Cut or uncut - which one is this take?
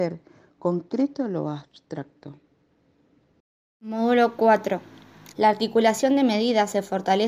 cut